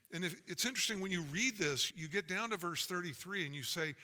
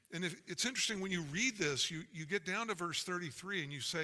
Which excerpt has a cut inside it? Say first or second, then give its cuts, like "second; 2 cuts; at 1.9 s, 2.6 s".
first; 1 cut; at 1.9 s